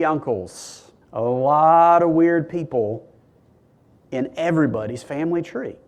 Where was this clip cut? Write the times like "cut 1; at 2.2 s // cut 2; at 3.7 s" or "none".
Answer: cut 1; at 1.0 s